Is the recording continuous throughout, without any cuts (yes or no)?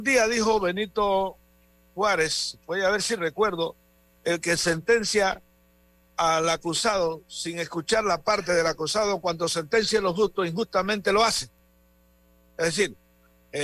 yes